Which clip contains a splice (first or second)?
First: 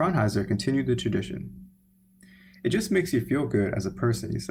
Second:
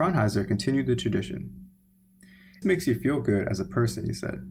second